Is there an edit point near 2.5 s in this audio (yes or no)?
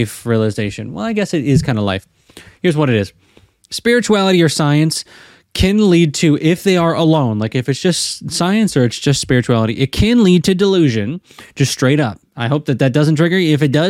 no